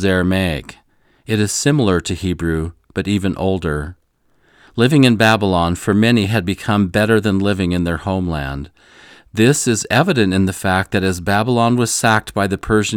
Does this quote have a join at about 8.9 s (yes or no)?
no